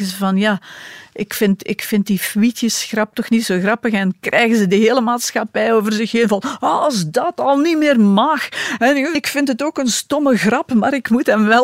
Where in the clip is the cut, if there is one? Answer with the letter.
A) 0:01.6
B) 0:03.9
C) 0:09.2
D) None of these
C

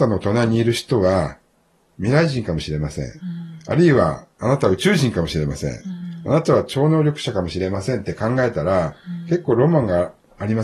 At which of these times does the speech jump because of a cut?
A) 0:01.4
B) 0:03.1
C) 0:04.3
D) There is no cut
C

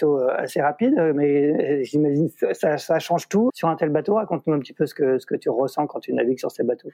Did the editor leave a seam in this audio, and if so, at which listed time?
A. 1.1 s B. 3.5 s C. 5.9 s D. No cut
B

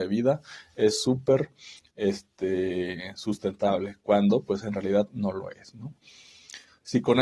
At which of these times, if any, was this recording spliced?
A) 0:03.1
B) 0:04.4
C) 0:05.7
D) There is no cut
D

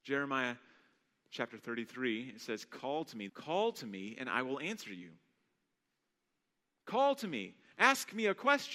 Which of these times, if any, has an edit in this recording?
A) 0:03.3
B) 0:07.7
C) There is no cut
A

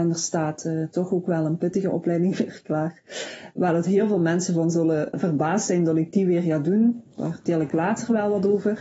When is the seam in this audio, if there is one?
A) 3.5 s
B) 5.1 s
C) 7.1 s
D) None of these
B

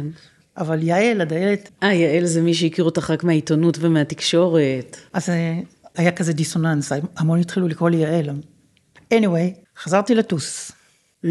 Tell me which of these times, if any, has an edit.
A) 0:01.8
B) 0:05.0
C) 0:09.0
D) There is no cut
C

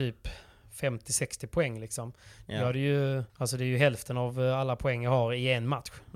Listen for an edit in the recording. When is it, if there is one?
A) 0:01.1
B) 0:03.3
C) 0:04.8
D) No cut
B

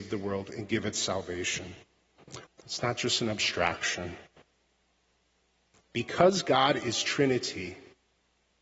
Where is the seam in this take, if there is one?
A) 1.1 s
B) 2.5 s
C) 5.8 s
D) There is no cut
B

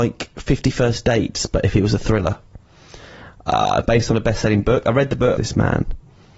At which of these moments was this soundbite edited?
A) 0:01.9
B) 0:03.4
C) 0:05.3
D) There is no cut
C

